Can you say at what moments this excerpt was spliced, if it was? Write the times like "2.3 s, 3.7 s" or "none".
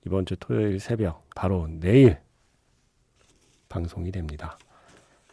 1.3 s